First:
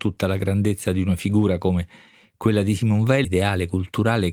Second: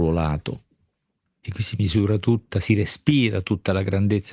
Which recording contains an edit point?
first; 1 cut; at 3.2 s

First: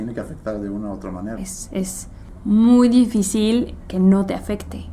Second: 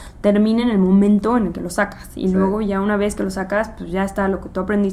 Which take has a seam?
first; 1 cut; at 1.4 s

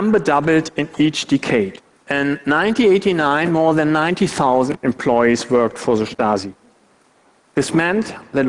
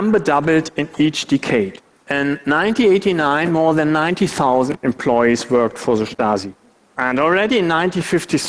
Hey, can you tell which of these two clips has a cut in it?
second; 1 cut; at 6.9 s

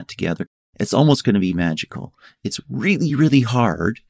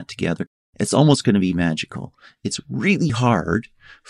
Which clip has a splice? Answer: second; 1 cut; at 3.1 s

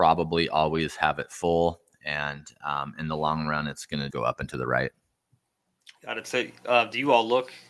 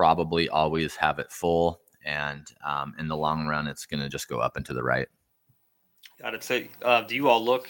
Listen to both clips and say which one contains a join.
first; 1 cut; at 4.1 s

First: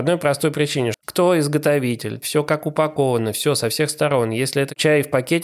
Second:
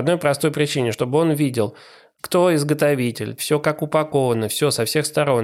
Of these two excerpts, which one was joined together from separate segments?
first; 1 cut; at 0.9 s

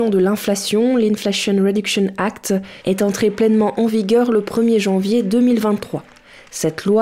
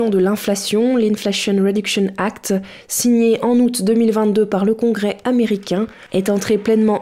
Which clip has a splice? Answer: first; 1 cut; at 2.8 s

